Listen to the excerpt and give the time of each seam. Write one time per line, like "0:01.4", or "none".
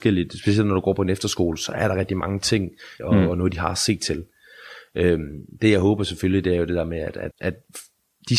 0:03.0
0:07.3